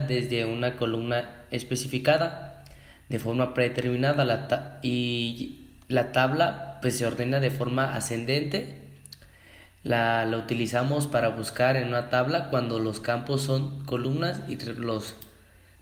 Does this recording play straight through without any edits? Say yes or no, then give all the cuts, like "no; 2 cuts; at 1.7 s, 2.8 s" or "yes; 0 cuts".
yes; 0 cuts